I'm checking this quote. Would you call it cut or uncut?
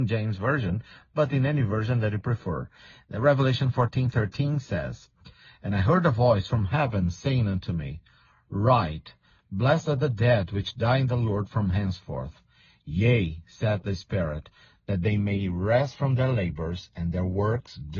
uncut